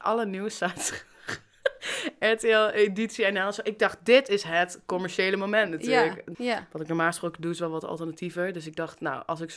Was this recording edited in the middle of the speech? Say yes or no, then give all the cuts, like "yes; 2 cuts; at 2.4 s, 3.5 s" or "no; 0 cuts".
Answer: yes; 1 cut; at 6.3 s